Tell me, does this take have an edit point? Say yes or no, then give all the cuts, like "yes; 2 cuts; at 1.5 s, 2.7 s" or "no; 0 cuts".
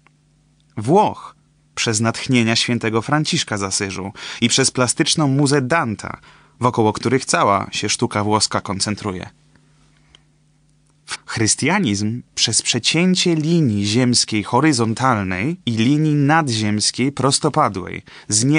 yes; 2 cuts; at 11.1 s, 15.6 s